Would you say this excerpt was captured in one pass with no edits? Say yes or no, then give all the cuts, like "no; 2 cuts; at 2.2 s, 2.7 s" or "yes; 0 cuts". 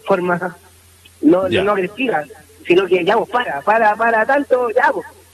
yes; 0 cuts